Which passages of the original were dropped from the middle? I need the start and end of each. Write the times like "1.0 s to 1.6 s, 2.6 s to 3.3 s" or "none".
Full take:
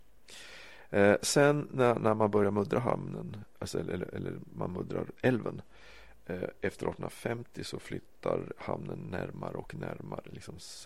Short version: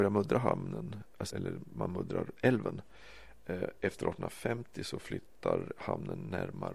3.7 s to 4.1 s